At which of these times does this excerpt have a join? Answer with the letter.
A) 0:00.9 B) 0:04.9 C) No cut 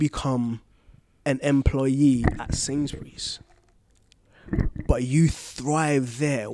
C